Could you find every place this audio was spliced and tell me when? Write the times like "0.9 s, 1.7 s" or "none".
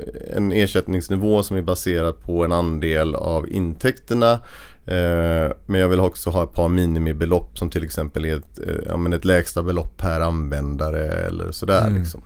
none